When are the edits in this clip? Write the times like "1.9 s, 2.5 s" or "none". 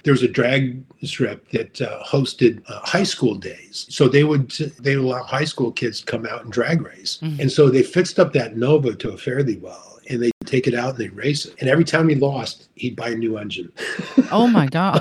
7.2 s